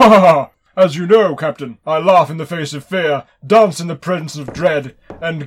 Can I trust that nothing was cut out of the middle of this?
yes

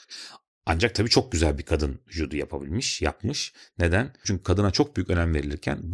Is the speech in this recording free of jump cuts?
no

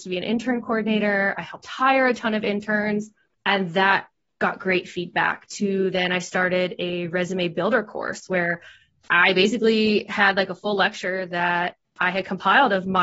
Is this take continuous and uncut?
no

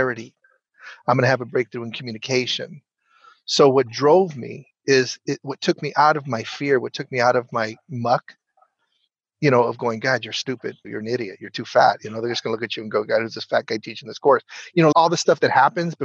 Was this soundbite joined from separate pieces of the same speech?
yes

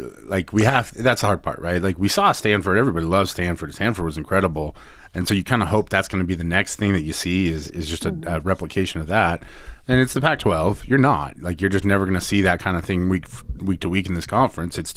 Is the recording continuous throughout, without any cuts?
yes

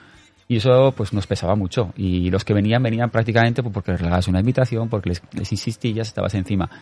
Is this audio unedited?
yes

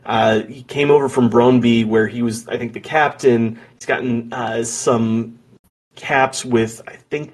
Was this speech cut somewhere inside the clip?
no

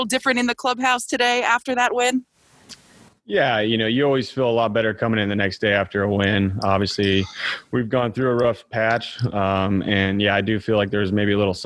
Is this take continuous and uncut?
yes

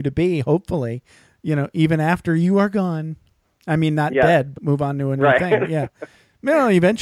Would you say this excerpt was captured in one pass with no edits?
no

